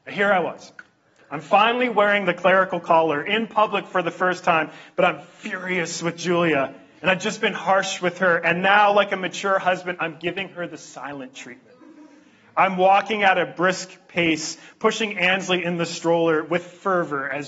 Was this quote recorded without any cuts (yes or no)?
yes